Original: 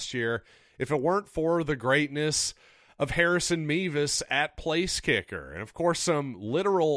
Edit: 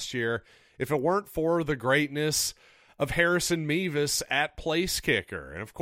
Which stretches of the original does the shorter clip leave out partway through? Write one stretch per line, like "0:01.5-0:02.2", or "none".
none

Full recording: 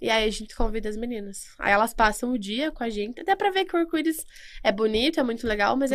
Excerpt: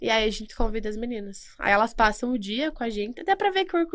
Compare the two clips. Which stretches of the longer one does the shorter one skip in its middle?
none

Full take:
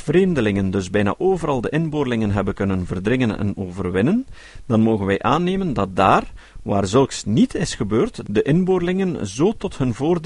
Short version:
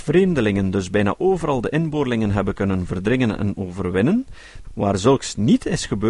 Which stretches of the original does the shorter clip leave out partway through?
0:04.6-0:06.5

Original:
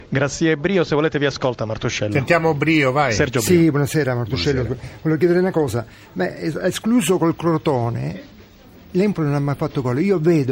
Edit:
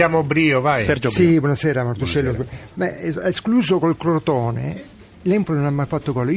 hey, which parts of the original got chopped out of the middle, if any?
0:05.0-0:06.1
0:08.5-0:08.8

